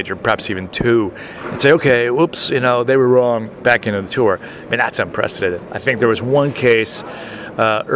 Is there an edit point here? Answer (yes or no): no